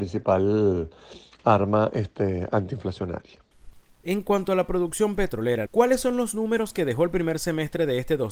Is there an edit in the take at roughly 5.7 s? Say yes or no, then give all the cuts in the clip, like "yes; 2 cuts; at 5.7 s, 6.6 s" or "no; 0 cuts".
yes; 2 cuts; at 4.0 s, 5.7 s